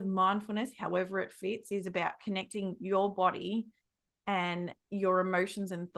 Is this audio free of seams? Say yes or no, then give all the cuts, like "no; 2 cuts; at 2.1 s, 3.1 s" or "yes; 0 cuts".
yes; 0 cuts